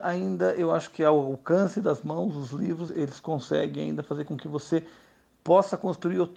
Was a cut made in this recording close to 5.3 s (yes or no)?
no